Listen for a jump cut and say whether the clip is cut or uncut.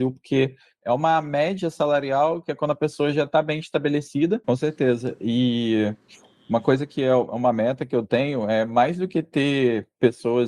cut